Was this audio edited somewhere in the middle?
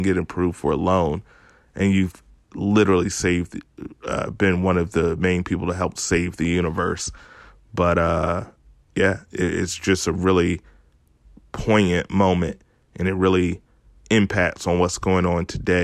no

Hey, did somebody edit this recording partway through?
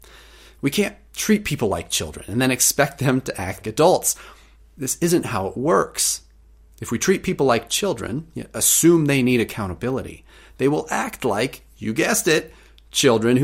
yes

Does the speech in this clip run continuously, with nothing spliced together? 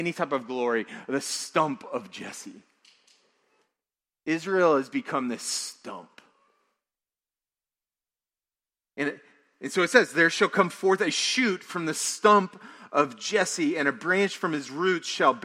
yes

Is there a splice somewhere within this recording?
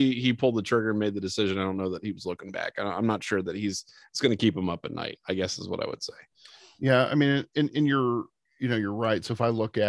no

